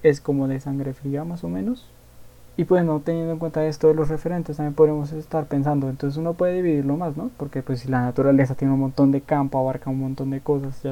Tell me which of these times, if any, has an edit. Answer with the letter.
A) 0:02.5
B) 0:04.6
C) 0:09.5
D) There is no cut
A